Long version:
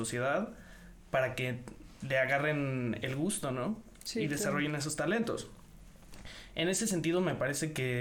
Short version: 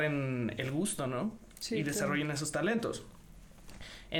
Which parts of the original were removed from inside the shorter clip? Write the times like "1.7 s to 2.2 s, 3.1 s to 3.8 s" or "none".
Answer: none